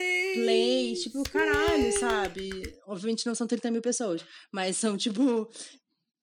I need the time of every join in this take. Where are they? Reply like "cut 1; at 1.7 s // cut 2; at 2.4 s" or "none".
none